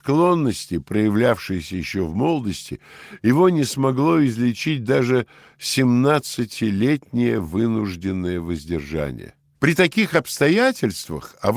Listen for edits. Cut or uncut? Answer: cut